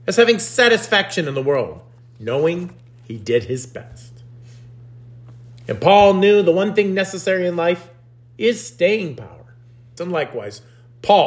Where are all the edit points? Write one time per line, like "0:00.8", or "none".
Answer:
0:10.0